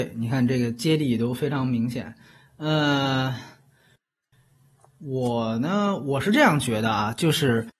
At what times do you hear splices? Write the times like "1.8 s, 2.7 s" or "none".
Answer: none